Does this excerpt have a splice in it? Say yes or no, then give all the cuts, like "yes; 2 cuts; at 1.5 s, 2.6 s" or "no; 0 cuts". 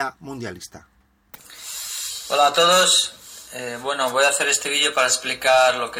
no; 0 cuts